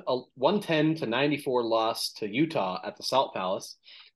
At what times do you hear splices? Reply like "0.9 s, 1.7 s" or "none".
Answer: none